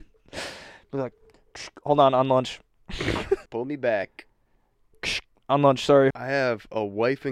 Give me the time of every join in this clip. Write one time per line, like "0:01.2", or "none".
0:03.5
0:06.1